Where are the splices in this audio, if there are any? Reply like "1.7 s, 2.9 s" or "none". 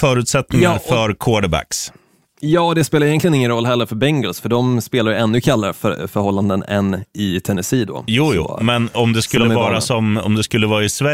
none